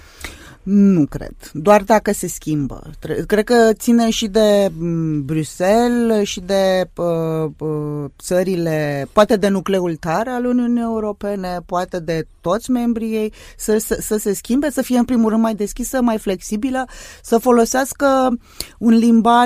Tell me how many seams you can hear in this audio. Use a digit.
1